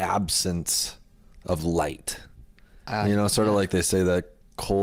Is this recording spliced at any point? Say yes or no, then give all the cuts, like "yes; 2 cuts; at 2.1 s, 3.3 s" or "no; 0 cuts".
no; 0 cuts